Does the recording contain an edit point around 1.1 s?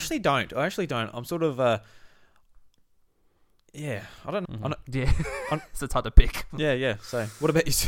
no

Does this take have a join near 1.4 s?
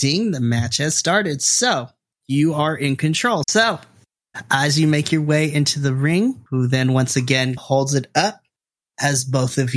no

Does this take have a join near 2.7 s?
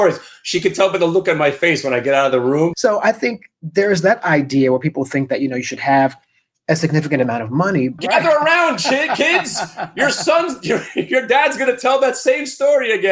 yes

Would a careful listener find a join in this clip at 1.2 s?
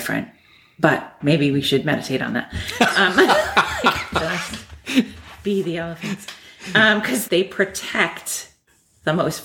yes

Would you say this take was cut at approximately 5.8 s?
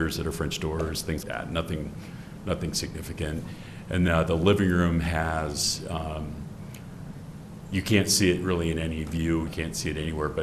no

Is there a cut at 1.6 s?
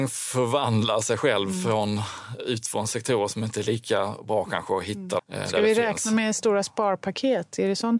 no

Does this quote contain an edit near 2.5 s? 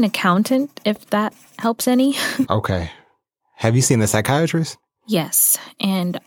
yes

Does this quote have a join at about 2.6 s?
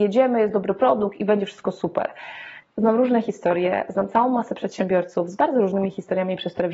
yes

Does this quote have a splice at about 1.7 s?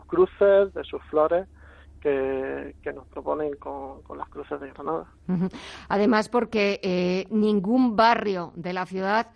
no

